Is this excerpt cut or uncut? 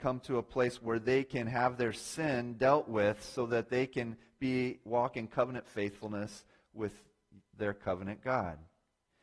uncut